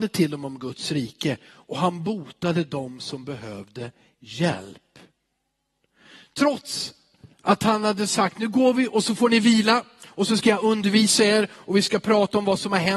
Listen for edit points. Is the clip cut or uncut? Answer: uncut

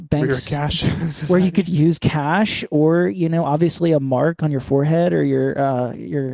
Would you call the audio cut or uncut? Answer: cut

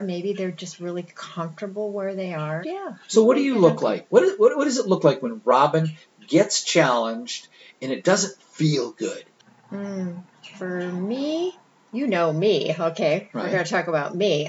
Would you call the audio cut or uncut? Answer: cut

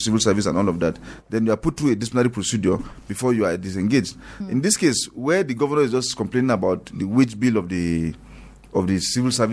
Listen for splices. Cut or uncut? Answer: uncut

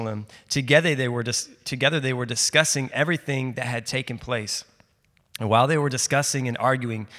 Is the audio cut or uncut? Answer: uncut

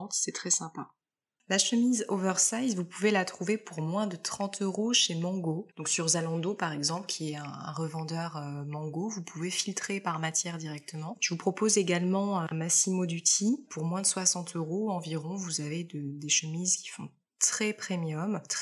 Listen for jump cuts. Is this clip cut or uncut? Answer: cut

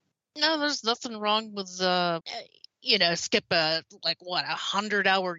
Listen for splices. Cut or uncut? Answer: cut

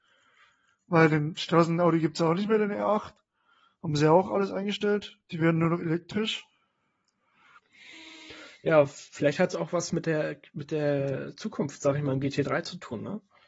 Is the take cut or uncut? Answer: uncut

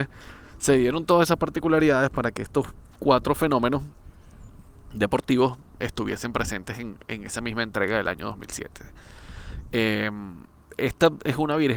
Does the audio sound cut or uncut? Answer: uncut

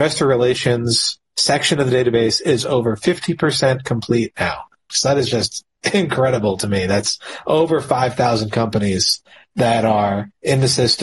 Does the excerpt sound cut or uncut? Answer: cut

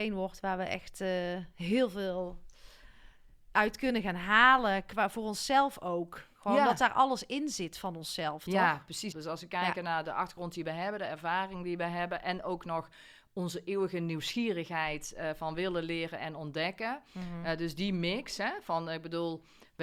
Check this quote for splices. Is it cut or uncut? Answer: cut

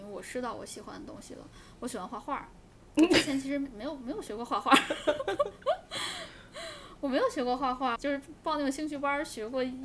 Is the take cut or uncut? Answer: cut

